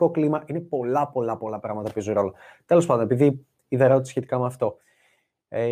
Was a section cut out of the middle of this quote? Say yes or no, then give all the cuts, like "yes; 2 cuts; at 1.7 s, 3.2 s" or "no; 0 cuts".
no; 0 cuts